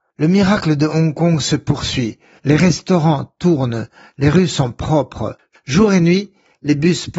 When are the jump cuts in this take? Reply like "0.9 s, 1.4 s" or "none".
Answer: 2.4 s